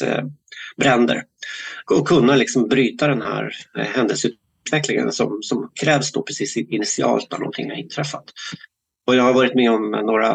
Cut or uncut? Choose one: uncut